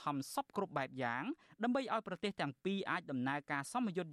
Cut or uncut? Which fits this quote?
uncut